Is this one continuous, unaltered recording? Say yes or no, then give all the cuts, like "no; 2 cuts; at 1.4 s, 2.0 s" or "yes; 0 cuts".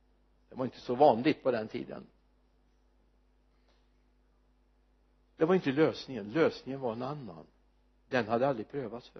yes; 0 cuts